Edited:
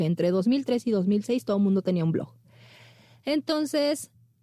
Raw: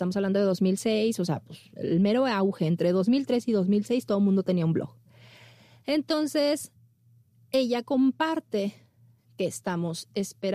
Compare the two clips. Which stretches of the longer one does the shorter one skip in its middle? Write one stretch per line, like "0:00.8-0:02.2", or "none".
none